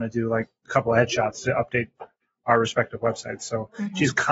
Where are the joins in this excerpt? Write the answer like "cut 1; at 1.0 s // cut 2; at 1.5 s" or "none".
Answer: none